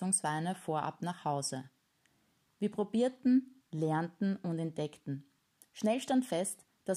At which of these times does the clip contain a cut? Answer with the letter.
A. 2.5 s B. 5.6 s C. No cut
A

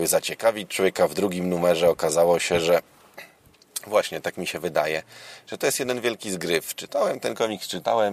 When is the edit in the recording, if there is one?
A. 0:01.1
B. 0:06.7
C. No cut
C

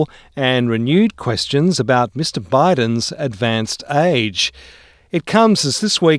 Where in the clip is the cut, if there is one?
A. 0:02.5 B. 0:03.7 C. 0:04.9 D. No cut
D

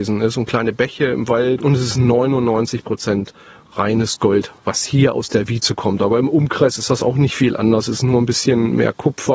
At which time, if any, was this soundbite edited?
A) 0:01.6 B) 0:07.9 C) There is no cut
A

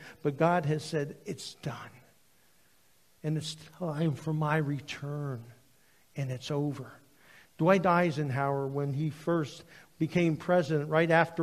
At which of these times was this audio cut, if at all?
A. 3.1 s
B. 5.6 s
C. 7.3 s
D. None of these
D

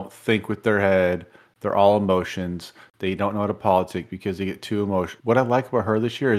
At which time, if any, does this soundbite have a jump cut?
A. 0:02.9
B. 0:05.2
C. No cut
B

